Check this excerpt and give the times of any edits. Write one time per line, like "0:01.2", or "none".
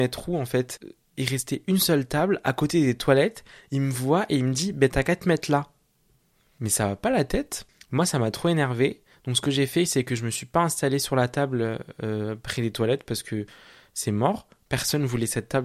none